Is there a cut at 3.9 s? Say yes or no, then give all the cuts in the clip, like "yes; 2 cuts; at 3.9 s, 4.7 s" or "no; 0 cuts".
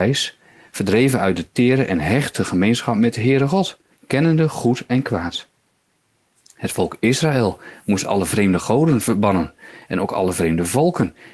yes; 1 cut; at 3.9 s